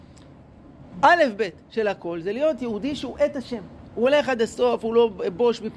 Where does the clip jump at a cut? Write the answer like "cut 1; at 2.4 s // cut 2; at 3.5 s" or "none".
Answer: none